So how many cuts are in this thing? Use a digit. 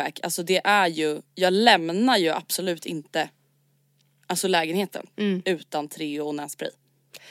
0